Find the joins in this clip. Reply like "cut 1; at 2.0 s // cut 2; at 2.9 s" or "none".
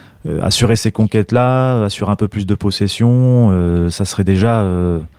none